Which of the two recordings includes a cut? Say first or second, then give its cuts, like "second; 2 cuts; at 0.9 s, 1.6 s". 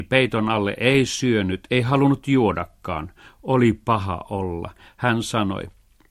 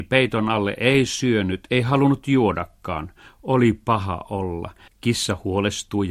second; 1 cut; at 4.9 s